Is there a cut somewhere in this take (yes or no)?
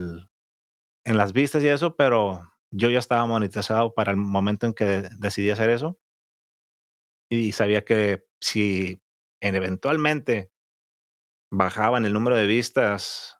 no